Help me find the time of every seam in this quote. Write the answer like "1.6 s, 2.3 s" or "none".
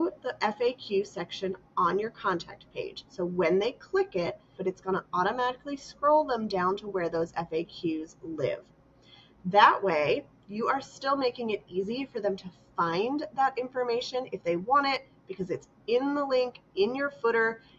4.6 s